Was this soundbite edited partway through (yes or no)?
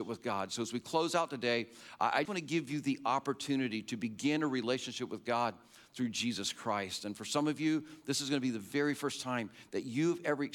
yes